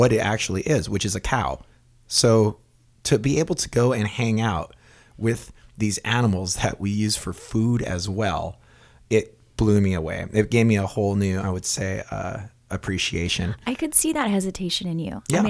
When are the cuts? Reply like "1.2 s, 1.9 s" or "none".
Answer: 11.4 s